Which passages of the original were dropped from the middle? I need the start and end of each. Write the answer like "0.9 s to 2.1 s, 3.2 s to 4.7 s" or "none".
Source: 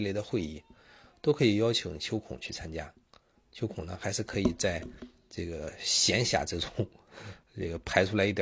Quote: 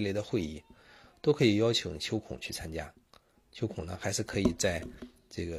none